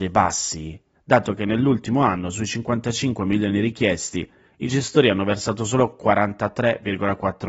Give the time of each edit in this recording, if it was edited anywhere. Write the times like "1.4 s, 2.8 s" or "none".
0.9 s